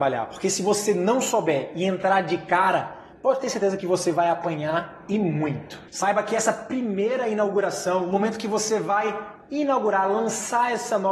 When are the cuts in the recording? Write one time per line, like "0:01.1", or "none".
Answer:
0:05.9